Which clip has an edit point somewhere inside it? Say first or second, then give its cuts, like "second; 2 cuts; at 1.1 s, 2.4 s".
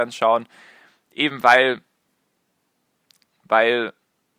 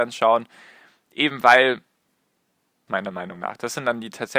second; 1 cut; at 2.9 s